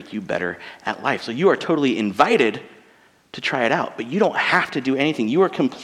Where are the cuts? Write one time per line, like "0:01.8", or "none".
none